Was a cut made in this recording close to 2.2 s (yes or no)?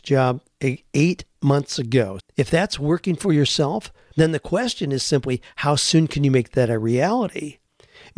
yes